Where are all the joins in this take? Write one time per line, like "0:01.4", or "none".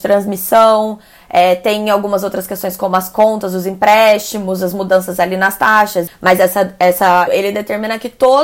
0:06.1
0:07.3